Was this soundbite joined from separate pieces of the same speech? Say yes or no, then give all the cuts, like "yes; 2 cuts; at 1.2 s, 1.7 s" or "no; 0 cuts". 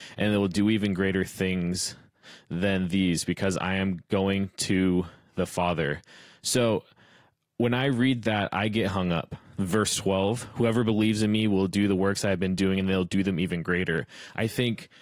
no; 0 cuts